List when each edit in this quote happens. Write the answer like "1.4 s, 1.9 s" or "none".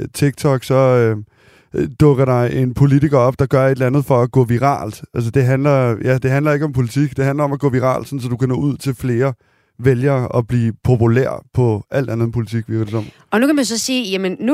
none